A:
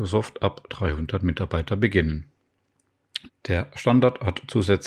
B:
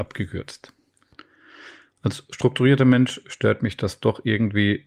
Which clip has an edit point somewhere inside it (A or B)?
A